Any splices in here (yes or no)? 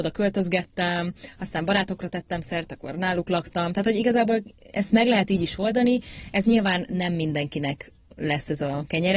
no